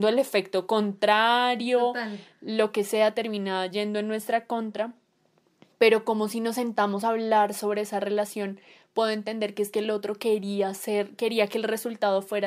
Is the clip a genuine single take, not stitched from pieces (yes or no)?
yes